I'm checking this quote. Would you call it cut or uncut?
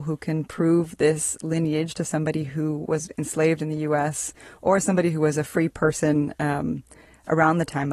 uncut